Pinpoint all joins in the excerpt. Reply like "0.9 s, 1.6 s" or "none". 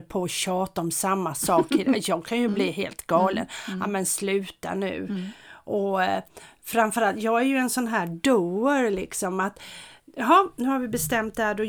none